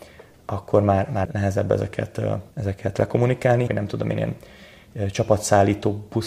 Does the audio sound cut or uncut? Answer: cut